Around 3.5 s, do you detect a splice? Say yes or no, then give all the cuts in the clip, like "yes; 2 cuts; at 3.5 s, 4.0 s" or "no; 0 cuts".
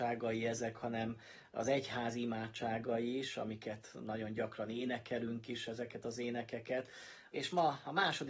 no; 1 cut; at 7.3 s